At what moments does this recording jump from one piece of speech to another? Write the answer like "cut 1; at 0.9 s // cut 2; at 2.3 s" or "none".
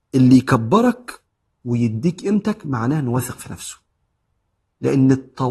none